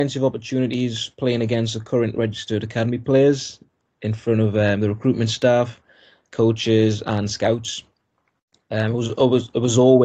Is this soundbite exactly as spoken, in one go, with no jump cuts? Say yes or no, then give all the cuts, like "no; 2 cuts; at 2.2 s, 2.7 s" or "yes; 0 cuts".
yes; 0 cuts